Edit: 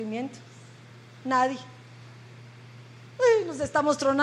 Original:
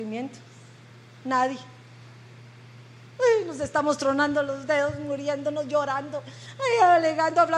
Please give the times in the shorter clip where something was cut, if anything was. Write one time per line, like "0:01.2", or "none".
none